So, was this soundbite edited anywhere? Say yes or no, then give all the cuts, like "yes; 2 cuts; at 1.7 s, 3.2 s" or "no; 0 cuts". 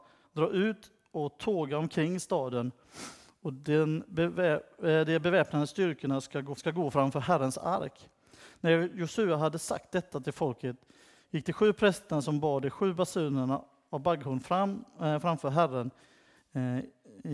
yes; 1 cut; at 6.6 s